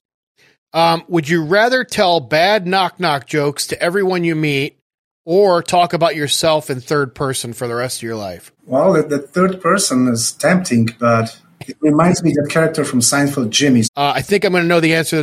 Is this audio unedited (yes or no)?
no